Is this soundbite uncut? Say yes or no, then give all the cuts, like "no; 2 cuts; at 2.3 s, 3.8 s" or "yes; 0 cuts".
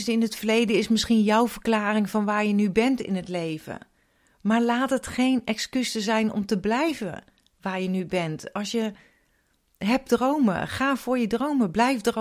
yes; 0 cuts